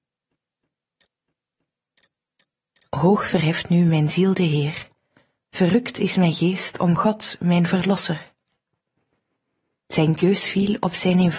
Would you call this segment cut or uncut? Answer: uncut